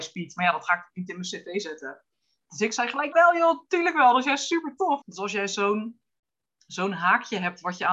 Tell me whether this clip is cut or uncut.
cut